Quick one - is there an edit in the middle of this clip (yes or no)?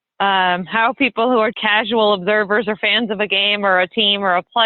yes